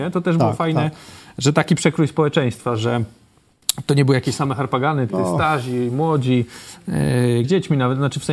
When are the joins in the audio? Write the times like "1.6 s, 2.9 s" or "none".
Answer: 5.1 s, 7.4 s